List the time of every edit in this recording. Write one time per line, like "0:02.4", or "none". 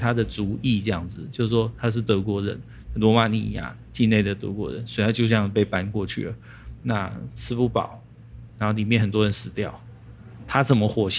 0:06.8
0:08.5